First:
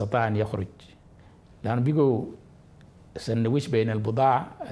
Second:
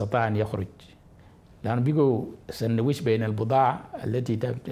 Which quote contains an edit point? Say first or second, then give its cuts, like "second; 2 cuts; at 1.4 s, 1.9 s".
second; 1 cut; at 2.4 s